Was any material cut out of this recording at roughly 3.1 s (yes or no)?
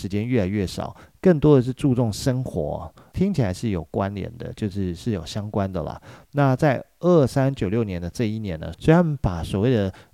yes